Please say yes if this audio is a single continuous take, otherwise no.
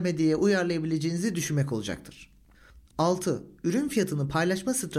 yes